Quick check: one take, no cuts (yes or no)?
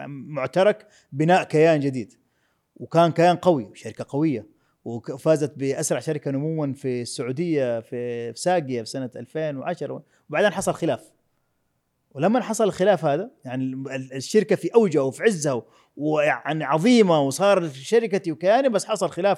yes